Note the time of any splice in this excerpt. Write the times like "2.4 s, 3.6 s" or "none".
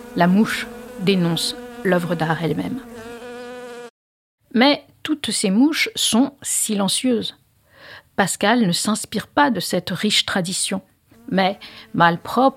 11.1 s